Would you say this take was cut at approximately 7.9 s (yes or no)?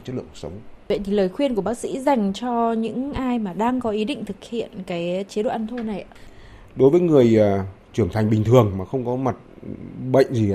no